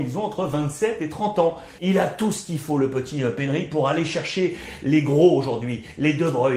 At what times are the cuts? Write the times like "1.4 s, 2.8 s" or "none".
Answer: 1.8 s